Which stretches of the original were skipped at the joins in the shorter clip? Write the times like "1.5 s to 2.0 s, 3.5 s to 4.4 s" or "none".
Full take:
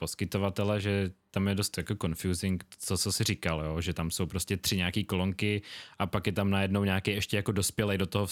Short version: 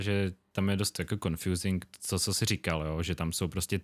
none